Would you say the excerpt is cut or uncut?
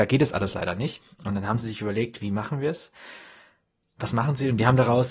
uncut